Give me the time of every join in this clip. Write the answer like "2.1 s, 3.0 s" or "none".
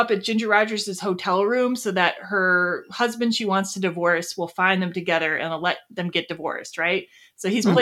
none